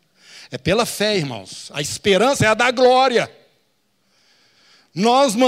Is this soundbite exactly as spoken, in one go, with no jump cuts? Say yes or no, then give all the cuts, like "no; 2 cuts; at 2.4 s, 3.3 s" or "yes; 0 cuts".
yes; 0 cuts